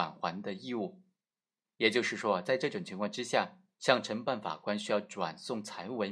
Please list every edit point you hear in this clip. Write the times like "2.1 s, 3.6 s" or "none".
3.7 s